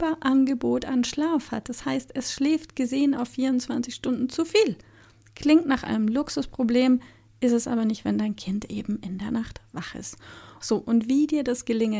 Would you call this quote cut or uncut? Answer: cut